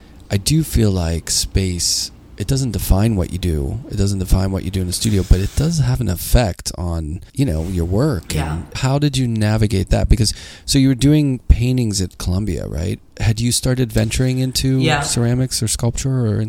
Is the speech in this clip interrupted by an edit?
yes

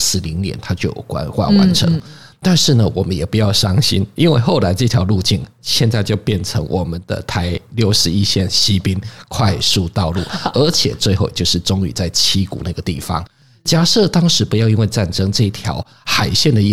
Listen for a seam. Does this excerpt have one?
no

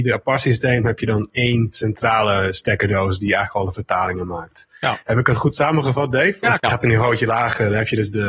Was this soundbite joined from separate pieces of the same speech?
yes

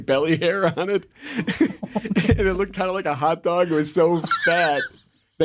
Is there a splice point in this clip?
no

